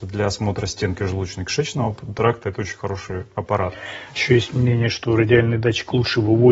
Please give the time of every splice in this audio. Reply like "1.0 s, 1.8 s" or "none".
none